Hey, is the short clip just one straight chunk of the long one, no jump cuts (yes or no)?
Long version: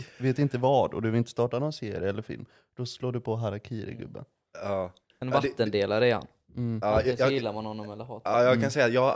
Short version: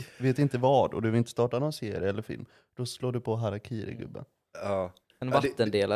yes